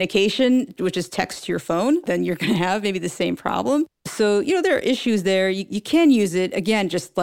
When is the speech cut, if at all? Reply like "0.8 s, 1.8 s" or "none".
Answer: none